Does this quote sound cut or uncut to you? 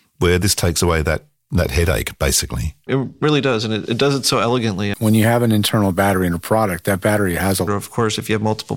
cut